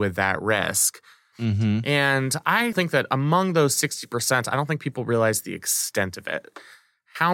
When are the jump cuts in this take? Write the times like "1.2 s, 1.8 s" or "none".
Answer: 1.3 s, 2.7 s